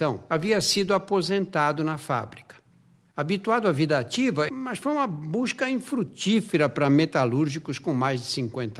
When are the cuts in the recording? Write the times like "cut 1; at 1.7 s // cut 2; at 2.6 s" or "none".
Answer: cut 1; at 4.5 s